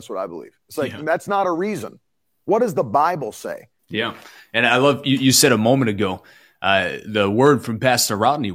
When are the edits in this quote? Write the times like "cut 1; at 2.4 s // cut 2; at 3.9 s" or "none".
cut 1; at 3.8 s